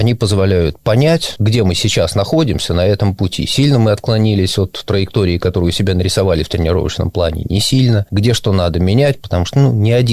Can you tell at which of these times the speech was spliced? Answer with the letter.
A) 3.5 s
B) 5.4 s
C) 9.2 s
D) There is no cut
D